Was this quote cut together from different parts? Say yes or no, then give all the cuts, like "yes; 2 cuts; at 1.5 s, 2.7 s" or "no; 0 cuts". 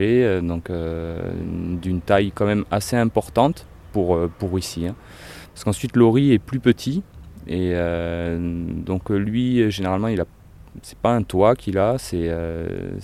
no; 0 cuts